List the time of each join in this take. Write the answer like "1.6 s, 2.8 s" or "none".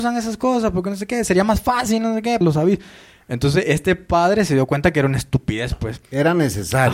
2.4 s